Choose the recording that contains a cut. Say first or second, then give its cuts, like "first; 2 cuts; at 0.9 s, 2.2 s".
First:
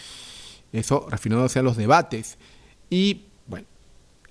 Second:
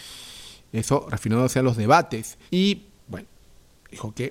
second; 1 cut; at 2.5 s